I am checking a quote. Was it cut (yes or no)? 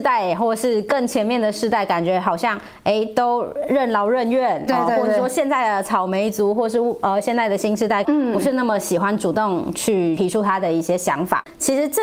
yes